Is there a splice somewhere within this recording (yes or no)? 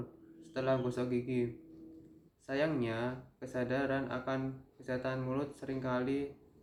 yes